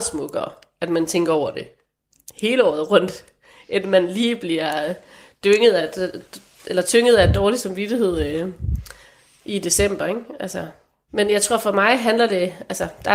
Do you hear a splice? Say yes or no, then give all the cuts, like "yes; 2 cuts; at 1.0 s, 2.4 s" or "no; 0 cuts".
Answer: no; 0 cuts